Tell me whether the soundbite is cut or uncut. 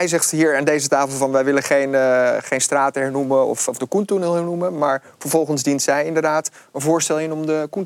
cut